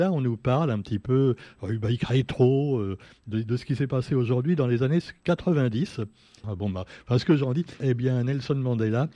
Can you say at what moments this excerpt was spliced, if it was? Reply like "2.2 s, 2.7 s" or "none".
6.4 s, 7.8 s

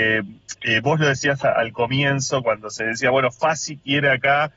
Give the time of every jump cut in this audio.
none

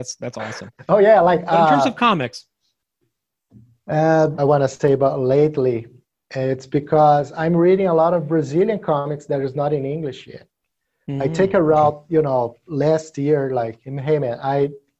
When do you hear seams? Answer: 4.4 s

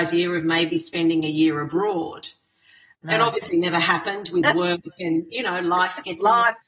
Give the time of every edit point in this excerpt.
none

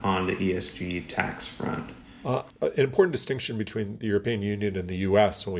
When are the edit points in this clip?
none

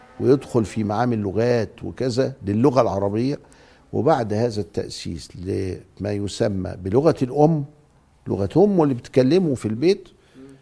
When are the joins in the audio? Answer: 9.6 s

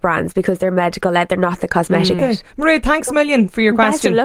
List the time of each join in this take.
2.2 s

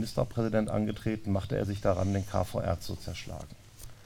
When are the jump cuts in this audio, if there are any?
none

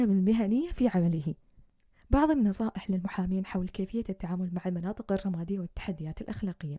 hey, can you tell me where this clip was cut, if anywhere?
none

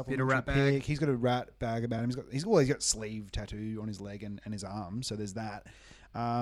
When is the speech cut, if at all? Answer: none

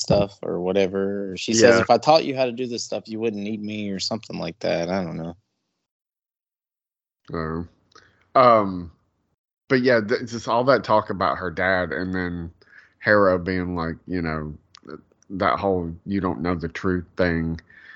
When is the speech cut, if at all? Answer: none

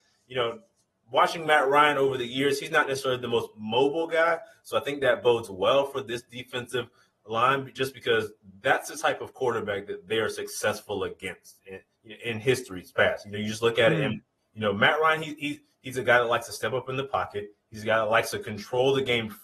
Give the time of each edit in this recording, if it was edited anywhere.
none

